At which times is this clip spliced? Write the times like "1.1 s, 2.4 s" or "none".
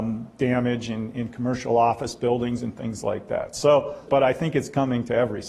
4.1 s